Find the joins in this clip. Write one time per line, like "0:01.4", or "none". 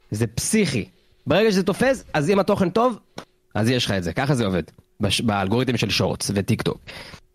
none